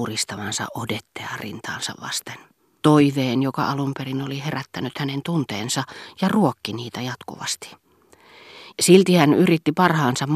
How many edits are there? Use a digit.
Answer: 2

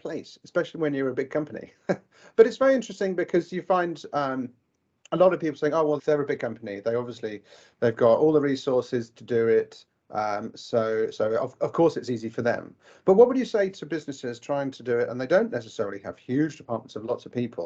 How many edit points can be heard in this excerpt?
1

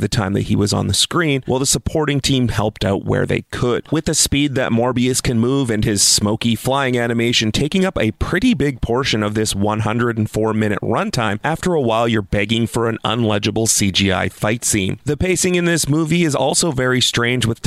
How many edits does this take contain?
1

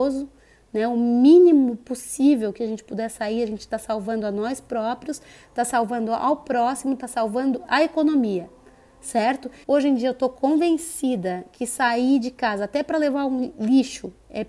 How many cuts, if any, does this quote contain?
1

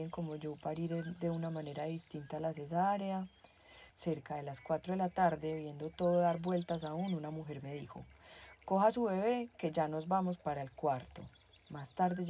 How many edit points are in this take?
1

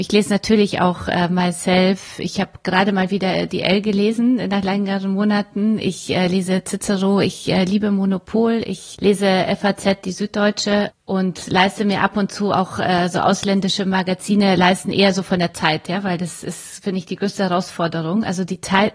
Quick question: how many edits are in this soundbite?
1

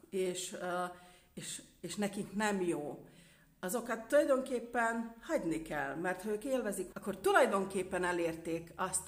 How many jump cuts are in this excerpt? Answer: 1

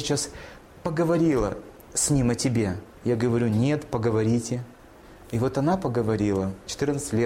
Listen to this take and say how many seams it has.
1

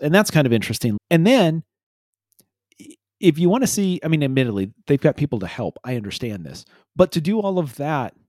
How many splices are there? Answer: 1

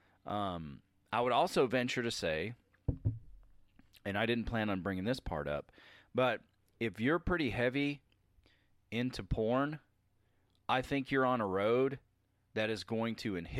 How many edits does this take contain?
0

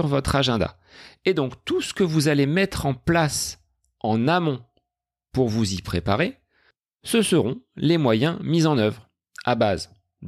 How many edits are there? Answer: 0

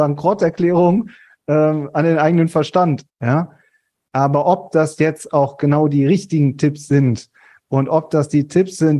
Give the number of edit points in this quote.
1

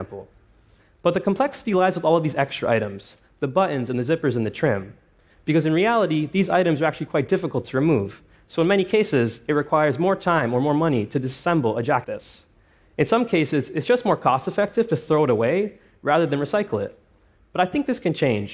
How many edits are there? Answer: 1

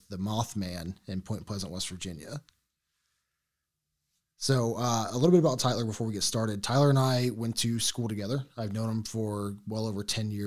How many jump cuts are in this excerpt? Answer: 0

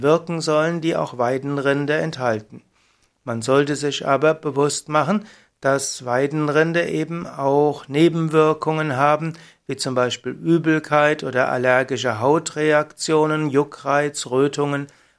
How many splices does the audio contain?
0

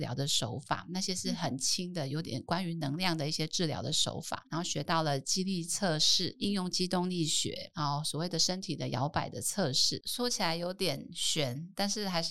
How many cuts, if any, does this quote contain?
1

